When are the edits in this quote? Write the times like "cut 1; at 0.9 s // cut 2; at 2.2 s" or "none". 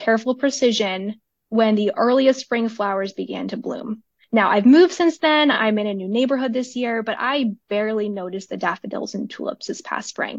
none

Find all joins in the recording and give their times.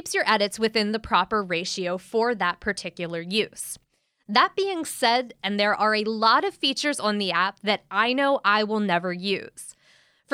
cut 1; at 5.4 s

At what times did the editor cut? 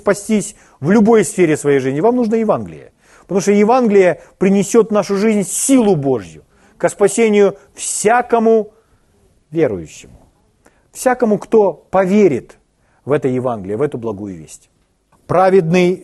cut 1; at 15.1 s

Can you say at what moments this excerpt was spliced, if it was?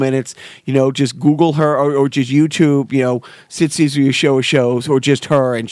none

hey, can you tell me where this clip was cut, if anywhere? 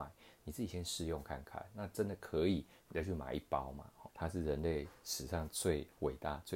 cut 1; at 4.1 s

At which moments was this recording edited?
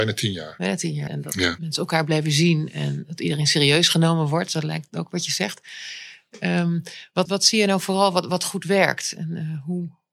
cut 1; at 1.1 s // cut 2; at 7.3 s

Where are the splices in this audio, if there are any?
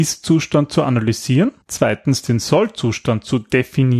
cut 1; at 1.6 s

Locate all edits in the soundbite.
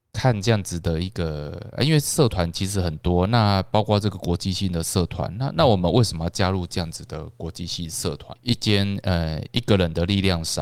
cut 1; at 8.4 s

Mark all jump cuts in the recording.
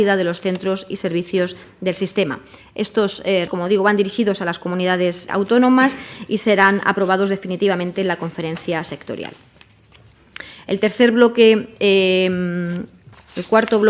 cut 1; at 3.5 s // cut 2; at 5.3 s

